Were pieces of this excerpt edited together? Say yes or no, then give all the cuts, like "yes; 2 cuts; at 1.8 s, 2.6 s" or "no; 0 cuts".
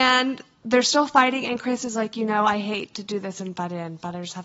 no; 0 cuts